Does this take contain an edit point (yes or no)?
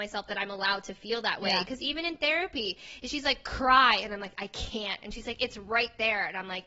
no